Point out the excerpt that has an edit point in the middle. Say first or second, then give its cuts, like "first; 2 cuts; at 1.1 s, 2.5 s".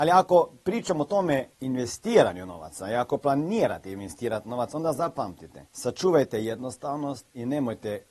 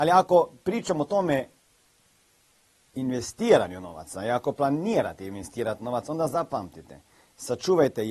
first; 2 cuts; at 1.5 s, 5.7 s